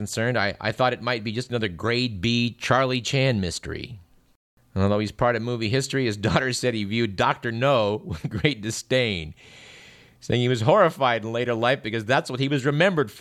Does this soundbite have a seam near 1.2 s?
no; 0 cuts

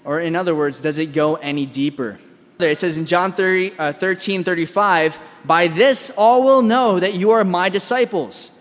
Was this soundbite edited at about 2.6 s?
yes; 1 cut; at 2.6 s

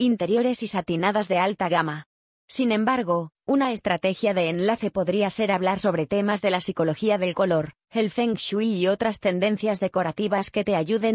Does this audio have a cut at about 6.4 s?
no; 1 cut; at 2.3 s

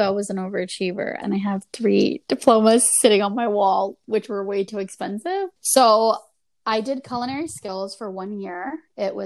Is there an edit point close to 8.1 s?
no; 2 cuts; at 1.2 s, 5.6 s

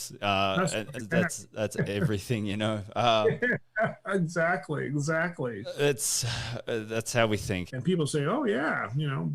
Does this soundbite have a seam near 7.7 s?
yes; 2 cuts; at 1.0 s, 7.7 s

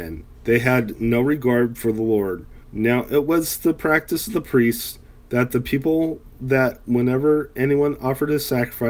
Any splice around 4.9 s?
no; 1 cut; at 2.6 s

